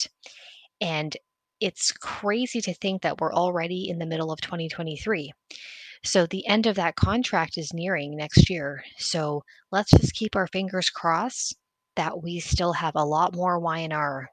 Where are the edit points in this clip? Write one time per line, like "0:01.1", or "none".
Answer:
none